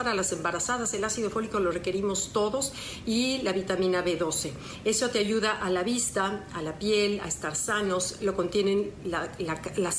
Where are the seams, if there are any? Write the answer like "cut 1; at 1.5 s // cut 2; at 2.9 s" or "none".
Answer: none